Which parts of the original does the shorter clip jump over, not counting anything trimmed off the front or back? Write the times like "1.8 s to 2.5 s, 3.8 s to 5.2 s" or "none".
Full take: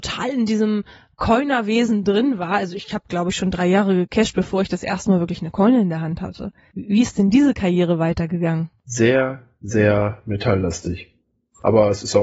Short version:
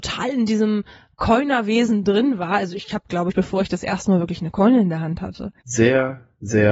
3.3 s to 4.3 s, 6.6 s to 8.8 s